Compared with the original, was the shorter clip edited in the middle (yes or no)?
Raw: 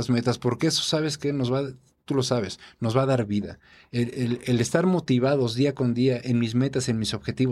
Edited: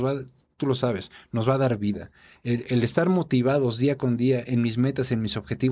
yes